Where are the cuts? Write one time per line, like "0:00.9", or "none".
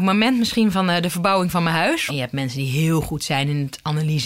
0:02.1